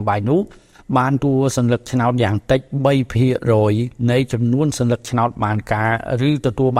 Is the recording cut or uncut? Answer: cut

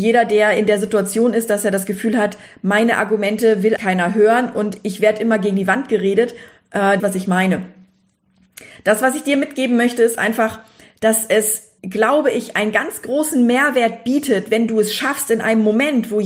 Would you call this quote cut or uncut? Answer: cut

